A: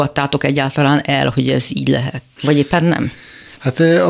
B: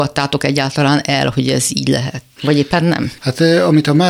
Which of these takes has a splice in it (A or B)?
B